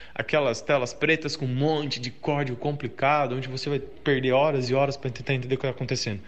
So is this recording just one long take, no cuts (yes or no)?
yes